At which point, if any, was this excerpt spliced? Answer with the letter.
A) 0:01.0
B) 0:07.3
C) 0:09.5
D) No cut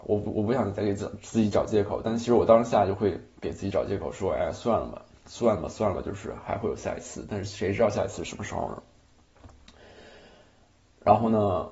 D